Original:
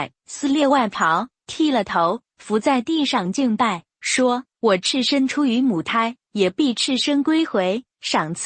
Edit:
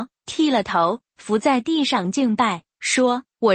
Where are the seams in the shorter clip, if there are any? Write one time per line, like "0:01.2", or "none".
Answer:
none